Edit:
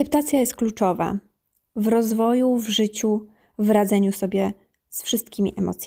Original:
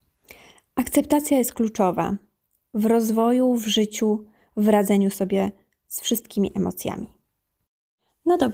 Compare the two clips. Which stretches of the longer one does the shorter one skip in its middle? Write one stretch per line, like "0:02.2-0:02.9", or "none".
none